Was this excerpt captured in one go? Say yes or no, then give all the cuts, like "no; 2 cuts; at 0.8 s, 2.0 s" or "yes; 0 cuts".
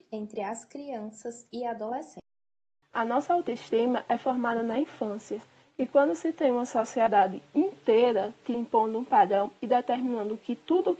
yes; 0 cuts